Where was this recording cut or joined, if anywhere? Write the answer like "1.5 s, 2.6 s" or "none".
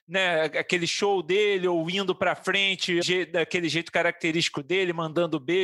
3.0 s

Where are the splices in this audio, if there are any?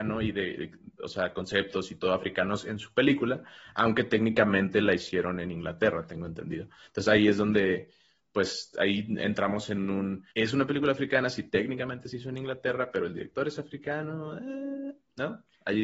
10.3 s

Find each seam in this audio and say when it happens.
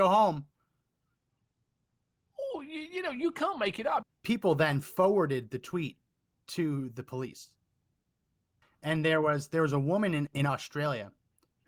4.0 s, 8.6 s

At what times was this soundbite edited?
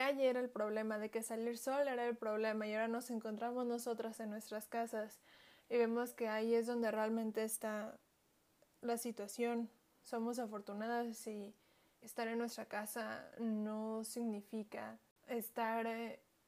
10.0 s, 12.0 s

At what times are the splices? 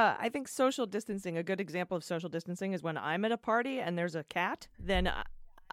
4.7 s

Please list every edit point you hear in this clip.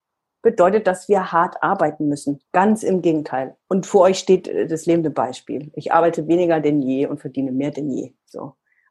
2.5 s

